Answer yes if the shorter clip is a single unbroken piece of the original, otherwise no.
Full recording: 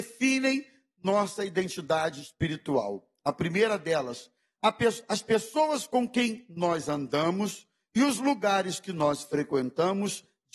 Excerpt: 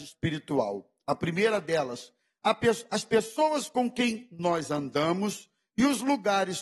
yes